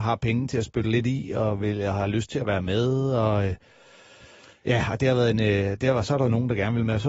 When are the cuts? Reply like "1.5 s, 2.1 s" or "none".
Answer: none